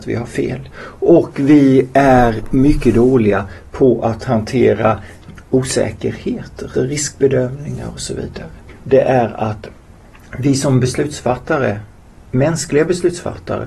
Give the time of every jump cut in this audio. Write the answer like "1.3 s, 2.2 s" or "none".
6.7 s, 8.7 s